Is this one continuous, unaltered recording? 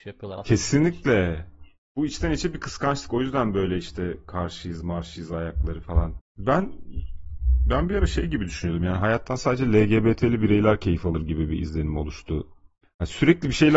no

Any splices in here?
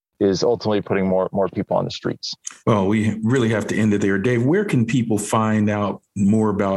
yes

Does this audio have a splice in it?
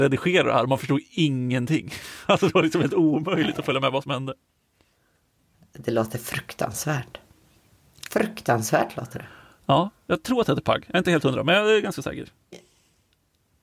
yes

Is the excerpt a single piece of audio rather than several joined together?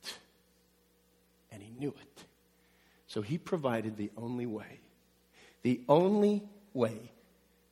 yes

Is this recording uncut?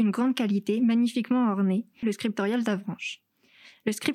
no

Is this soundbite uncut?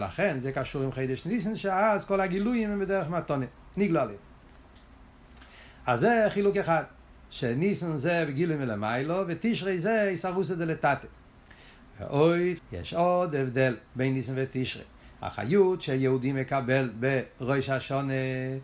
no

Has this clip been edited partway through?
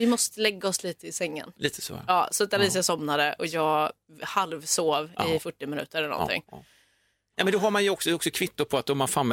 no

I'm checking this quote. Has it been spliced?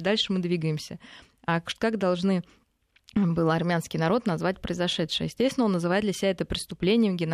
no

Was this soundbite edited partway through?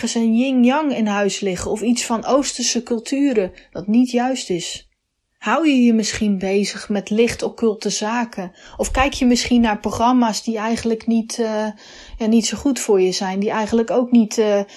no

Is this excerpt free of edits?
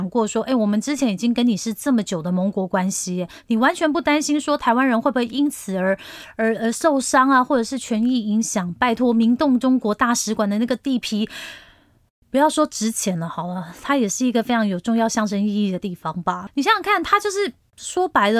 no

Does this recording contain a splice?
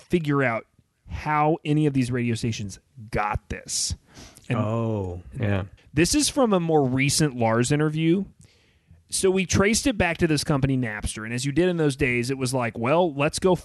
yes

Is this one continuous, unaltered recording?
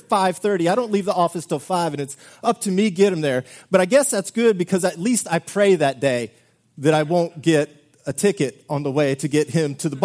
yes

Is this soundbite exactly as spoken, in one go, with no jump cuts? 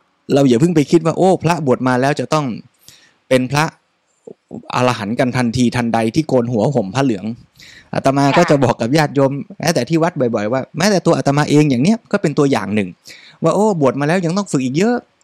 yes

